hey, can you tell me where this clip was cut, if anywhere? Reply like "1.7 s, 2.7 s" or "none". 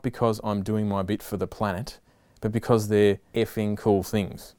3.3 s